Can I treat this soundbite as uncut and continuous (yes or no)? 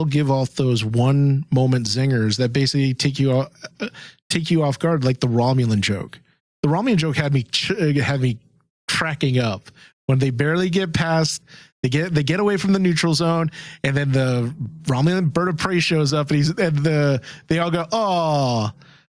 yes